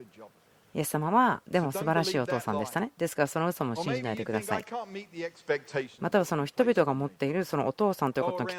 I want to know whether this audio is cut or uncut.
uncut